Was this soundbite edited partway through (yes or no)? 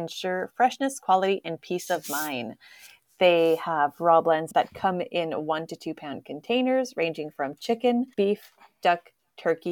yes